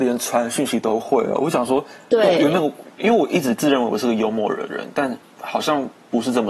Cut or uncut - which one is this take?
uncut